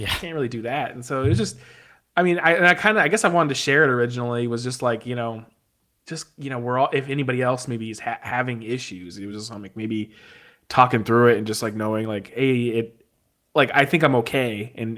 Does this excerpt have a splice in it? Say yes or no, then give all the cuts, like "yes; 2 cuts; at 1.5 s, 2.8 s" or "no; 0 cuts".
no; 0 cuts